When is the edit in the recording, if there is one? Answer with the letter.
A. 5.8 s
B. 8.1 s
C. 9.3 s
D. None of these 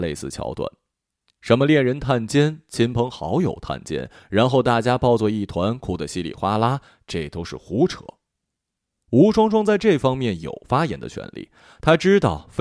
D